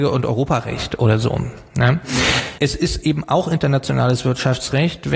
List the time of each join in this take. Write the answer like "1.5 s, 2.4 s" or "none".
none